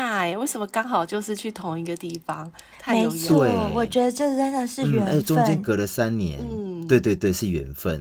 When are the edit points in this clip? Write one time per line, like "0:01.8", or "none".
none